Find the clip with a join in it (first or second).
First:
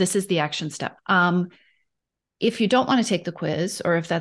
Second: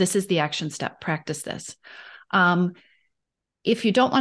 first